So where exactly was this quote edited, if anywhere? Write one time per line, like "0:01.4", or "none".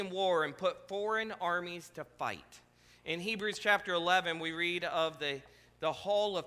none